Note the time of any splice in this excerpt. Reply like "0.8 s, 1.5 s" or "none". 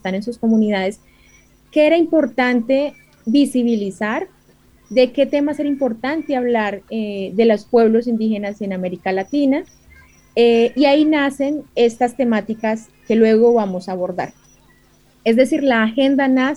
none